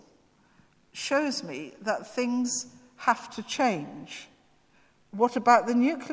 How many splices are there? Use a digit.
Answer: 1